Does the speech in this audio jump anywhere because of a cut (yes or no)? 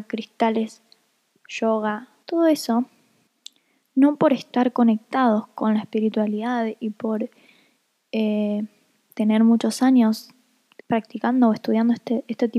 yes